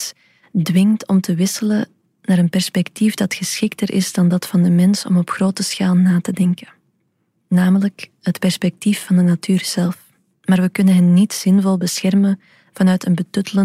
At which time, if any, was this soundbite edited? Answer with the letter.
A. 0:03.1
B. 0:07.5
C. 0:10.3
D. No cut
C